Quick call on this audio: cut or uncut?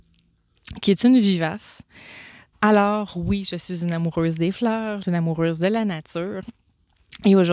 cut